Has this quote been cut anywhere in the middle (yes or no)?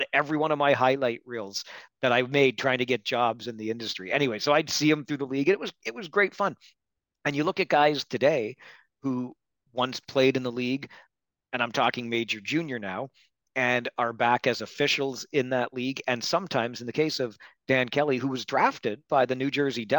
no